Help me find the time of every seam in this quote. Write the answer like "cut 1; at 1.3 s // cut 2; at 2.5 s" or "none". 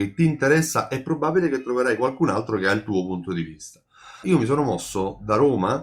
cut 1; at 4.2 s